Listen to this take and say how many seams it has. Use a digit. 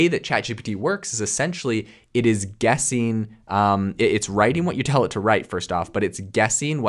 0